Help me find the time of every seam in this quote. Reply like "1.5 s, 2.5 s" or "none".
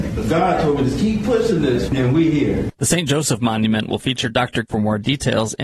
1.9 s, 4.6 s